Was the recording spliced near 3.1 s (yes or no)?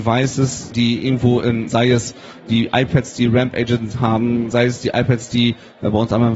no